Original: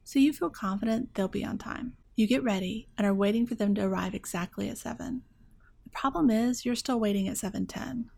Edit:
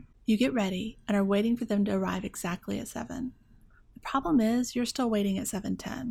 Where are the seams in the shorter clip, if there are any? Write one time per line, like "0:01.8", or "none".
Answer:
none

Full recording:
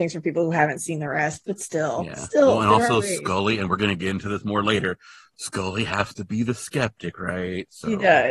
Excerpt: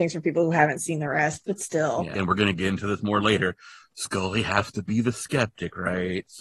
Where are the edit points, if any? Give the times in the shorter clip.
0:02.2

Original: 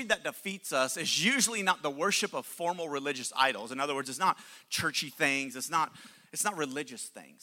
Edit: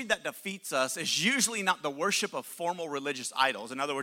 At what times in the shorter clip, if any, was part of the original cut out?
none

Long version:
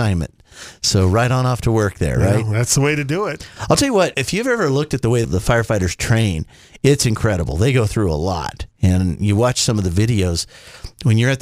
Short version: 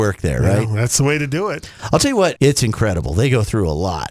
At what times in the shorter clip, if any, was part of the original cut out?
0:02.4

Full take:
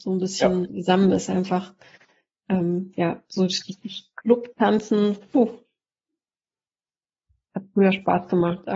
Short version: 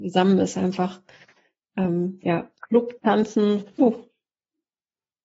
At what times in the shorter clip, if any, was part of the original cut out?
0:02.6

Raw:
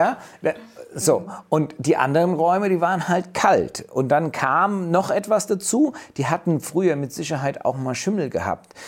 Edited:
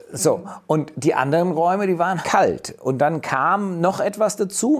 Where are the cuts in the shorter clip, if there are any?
0:02.2

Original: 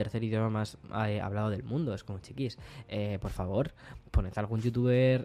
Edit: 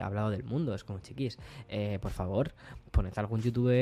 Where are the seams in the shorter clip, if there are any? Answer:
none

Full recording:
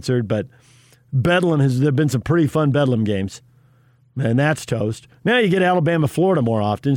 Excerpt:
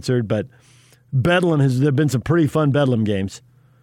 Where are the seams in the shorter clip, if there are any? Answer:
none

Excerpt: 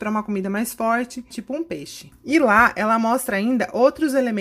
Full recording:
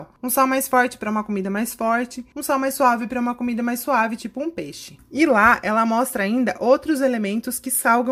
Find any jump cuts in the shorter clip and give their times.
0:01.3

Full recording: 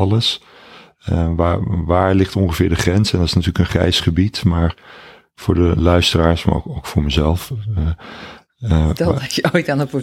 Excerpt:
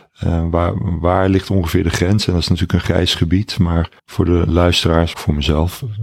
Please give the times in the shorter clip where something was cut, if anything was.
0:04.0
0:05.1

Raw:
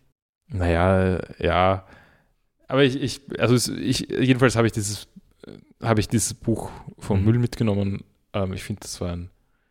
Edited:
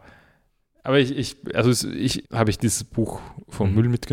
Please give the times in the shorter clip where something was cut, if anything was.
0:02.2

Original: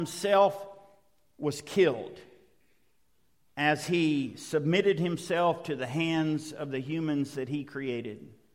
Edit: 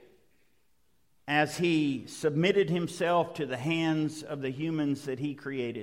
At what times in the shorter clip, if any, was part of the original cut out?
none

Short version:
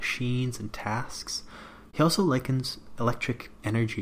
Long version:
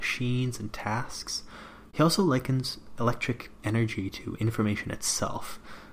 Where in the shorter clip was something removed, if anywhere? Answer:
none

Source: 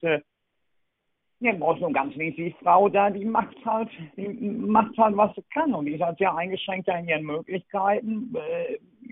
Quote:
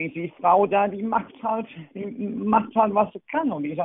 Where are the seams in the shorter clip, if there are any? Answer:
none

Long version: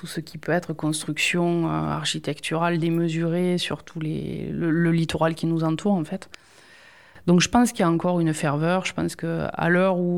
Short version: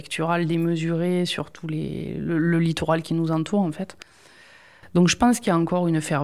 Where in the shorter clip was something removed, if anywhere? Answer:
none

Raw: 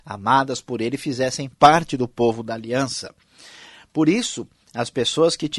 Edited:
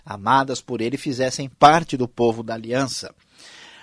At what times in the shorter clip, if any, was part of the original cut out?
none

